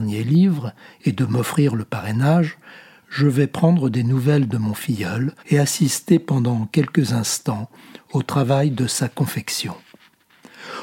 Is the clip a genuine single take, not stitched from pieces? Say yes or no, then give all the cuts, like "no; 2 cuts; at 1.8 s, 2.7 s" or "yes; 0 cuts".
no; 1 cut; at 5.4 s